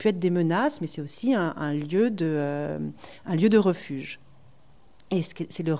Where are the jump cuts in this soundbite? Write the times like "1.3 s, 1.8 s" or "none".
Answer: none

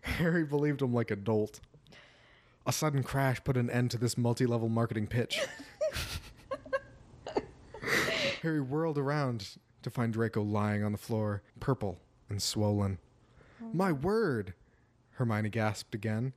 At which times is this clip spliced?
11.5 s

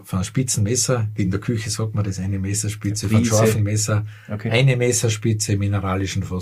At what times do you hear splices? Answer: none

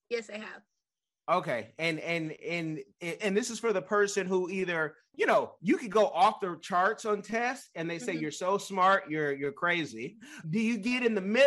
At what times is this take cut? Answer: 3.2 s, 10.4 s

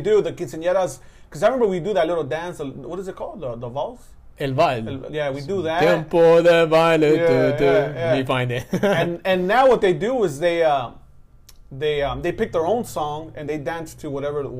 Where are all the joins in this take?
none

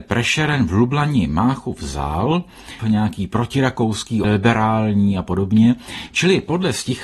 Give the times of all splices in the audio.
2.8 s, 4.2 s

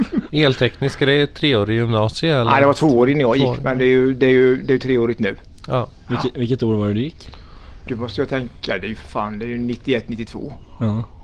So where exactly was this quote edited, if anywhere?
7.9 s

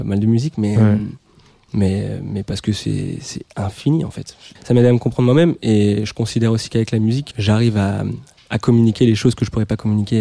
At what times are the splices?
4.6 s, 7.3 s

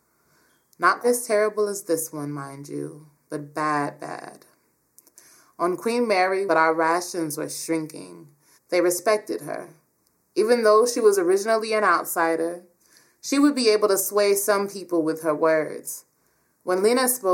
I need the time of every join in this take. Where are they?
1.0 s, 6.5 s, 8.6 s

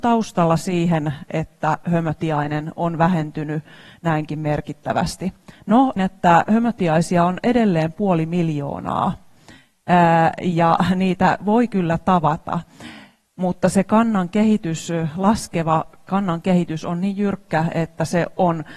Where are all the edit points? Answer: 6.0 s

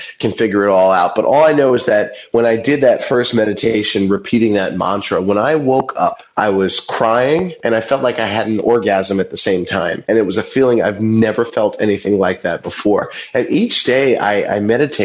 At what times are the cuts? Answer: none

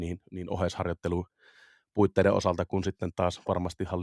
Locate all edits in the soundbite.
none

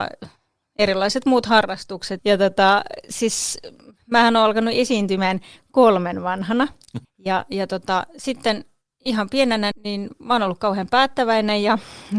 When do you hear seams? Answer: 2.2 s, 7.0 s, 9.7 s

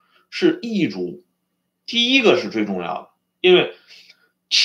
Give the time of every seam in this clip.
1.8 s

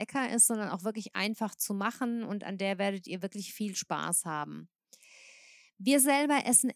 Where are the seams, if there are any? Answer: none

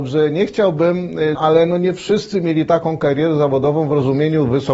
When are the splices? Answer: 1.4 s

